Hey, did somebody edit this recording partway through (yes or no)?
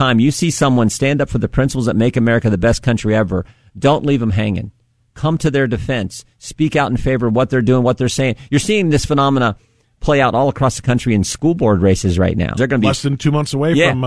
yes